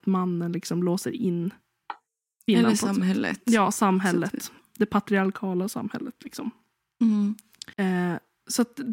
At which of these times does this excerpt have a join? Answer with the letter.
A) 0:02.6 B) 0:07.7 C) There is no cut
B